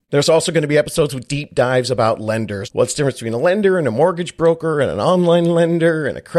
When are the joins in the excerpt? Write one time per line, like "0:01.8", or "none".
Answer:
0:02.7